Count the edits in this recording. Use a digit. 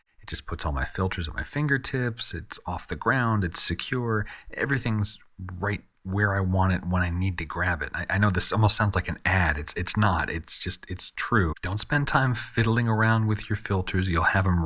1